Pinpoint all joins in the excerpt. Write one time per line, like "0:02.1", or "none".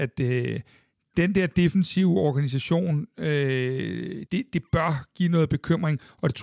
0:04.3